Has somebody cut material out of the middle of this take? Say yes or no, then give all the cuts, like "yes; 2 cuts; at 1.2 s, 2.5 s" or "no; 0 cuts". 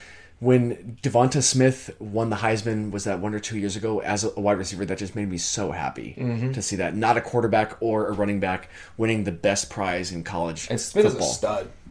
no; 0 cuts